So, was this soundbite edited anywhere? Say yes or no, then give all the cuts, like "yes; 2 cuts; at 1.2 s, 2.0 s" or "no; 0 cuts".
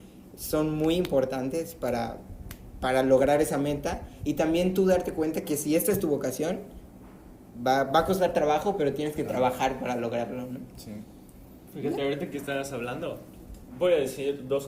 no; 0 cuts